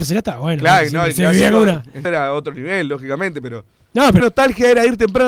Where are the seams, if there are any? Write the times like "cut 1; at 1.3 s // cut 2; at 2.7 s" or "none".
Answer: cut 1; at 2.0 s // cut 2; at 4.2 s